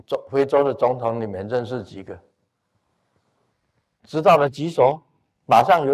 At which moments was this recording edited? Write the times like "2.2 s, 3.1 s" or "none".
4.0 s